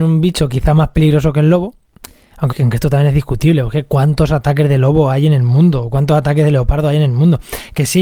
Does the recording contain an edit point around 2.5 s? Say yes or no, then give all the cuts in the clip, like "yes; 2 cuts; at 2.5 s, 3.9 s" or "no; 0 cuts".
yes; 1 cut; at 2.5 s